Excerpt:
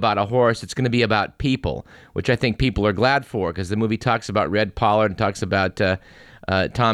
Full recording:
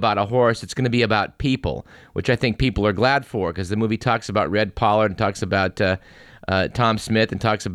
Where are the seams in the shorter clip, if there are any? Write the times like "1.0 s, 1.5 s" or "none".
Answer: none